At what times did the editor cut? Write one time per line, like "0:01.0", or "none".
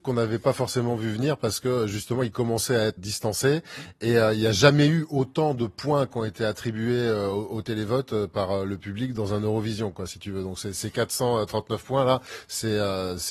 0:03.0